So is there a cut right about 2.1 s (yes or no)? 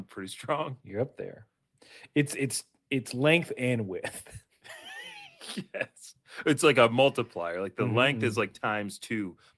no